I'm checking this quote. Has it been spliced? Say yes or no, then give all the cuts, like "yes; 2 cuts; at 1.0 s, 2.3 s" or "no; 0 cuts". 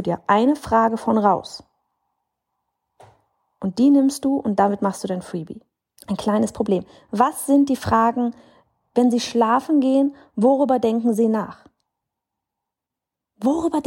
yes; 1 cut; at 6.0 s